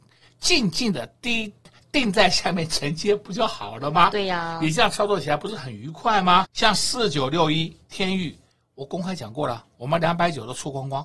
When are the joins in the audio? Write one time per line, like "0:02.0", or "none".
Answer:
0:06.5